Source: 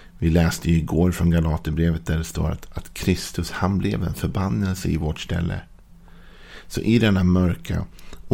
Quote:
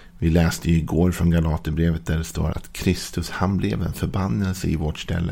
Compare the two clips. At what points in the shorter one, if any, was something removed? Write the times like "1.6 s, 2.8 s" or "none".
2.5 s